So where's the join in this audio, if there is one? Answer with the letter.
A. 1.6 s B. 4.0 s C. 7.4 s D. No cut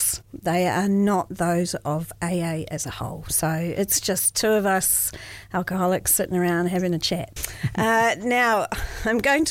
C